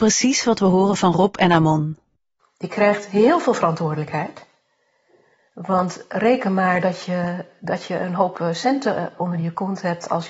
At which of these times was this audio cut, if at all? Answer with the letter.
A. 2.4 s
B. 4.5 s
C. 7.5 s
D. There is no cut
A